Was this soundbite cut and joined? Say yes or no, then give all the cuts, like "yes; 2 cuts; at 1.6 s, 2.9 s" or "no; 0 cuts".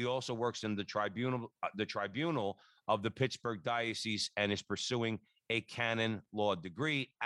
no; 0 cuts